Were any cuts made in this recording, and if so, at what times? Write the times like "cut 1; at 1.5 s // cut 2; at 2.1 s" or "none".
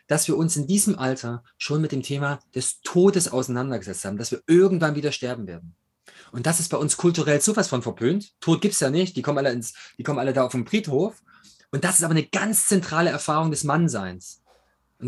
none